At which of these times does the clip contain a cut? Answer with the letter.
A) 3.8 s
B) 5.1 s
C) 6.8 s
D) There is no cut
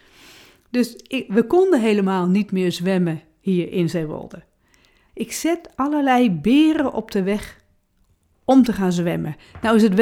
B